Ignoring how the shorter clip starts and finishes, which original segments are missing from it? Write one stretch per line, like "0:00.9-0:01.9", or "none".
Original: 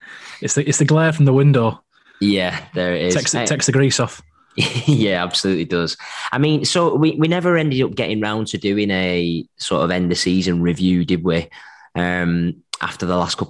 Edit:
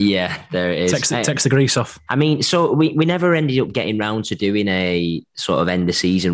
0:04.3-0:06.3

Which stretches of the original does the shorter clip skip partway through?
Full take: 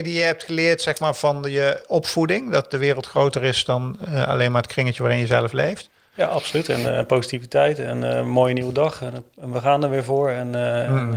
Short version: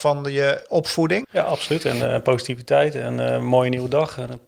0:02.4-0:06.1

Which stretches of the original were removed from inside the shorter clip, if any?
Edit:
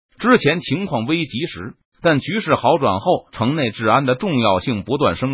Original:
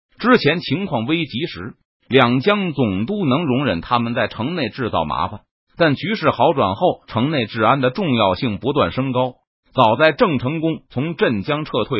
0:01.9-0:05.7

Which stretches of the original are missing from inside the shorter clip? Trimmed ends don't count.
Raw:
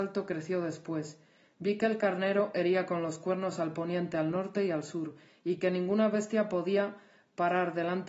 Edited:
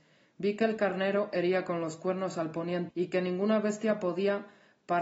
0:04.1-0:05.4

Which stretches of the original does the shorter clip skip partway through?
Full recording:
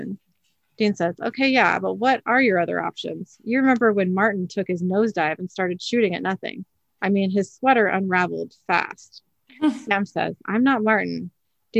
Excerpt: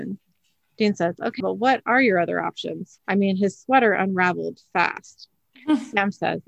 0:01.4-0:01.8
0:03.4-0:06.9

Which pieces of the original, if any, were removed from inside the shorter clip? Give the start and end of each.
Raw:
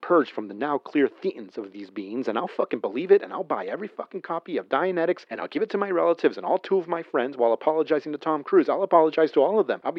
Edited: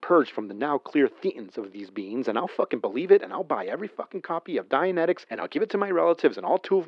none

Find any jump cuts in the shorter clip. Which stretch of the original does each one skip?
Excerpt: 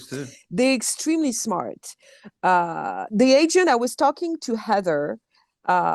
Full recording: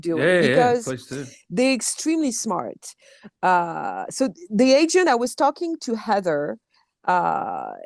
0:04.1-0:04.5

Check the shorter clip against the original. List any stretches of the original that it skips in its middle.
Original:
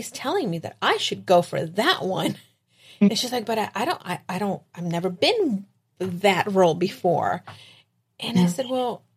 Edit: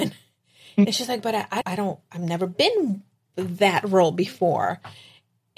0:03.9-0:04.2

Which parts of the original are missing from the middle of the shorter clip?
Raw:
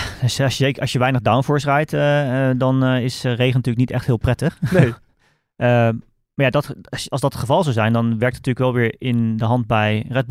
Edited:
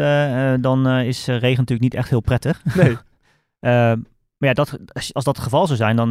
none

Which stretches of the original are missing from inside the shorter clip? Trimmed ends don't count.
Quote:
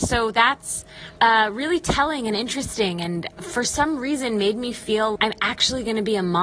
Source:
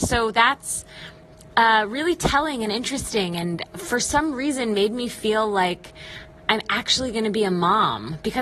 0:01.2-0:01.5
0:05.5-0:06.4

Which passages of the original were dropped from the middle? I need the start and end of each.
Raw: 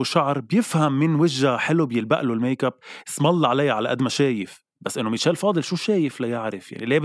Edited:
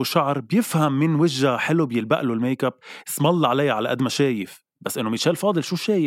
none

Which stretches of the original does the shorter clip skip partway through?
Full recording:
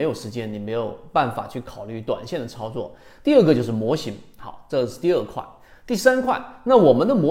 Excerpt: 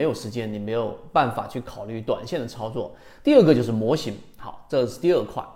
none

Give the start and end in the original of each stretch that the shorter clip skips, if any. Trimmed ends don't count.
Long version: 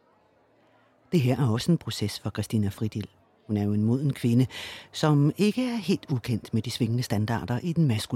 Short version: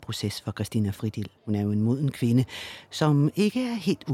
0:03.2-0:03.4

